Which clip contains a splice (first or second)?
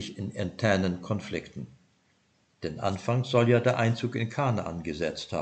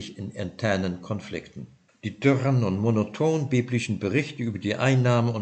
second